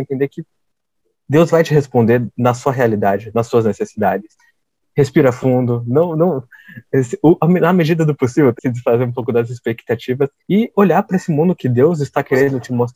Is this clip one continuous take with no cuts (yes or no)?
no